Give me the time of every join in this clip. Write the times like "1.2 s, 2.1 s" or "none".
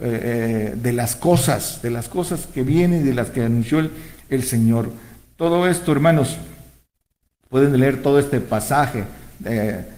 none